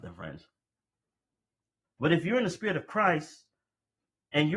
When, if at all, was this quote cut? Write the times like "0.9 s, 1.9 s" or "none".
1.8 s